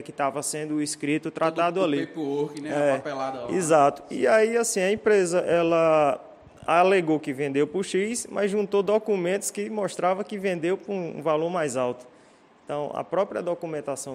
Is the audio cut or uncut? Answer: uncut